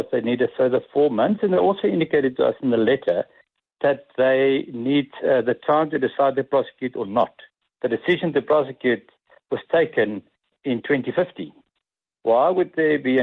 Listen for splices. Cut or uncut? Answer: cut